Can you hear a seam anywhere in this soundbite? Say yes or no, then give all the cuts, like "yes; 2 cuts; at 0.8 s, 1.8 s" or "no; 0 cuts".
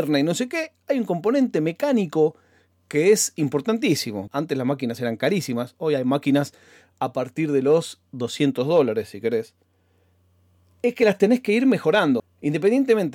yes; 2 cuts; at 4.3 s, 12.2 s